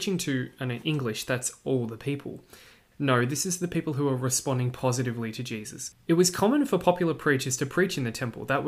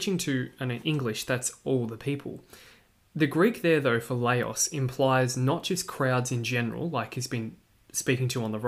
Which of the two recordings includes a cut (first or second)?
first